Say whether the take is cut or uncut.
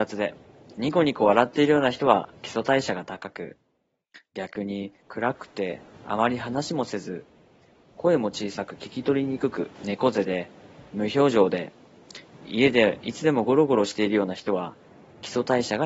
cut